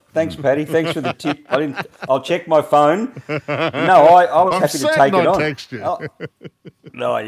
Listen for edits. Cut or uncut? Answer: uncut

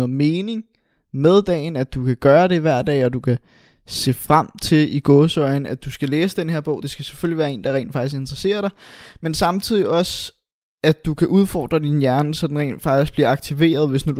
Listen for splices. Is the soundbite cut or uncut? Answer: uncut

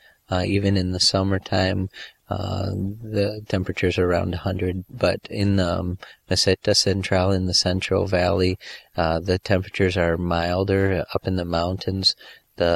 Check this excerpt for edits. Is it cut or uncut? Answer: uncut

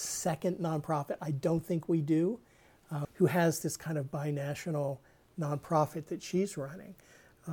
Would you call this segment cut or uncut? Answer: cut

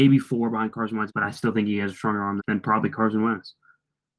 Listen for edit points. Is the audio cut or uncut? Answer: cut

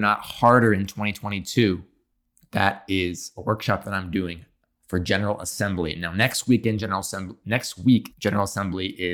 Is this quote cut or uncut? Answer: cut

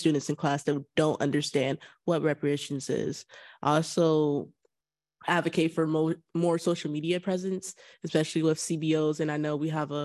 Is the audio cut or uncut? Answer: uncut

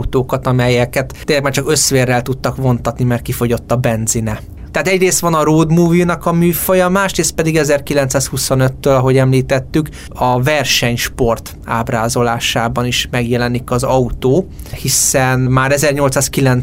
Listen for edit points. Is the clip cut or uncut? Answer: cut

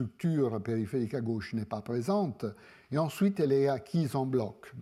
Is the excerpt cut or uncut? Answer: uncut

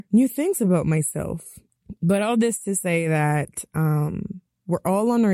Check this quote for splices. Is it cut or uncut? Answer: uncut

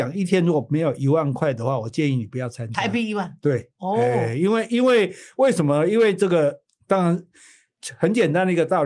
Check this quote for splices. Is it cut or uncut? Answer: uncut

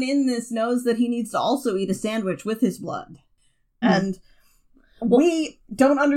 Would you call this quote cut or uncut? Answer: cut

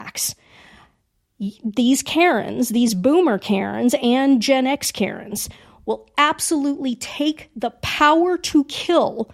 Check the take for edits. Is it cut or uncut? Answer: cut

